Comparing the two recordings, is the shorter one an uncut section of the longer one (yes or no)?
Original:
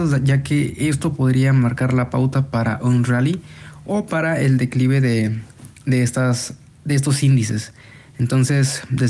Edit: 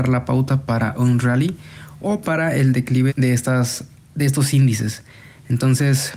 no